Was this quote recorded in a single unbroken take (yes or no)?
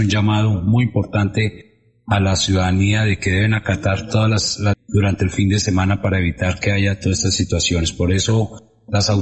no